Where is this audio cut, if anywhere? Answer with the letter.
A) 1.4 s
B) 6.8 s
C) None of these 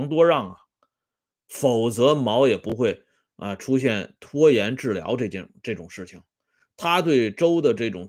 A